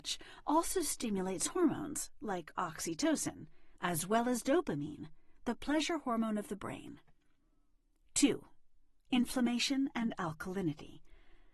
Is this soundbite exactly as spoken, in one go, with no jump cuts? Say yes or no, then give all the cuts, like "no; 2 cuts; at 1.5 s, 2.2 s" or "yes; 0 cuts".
no; 1 cut; at 3.8 s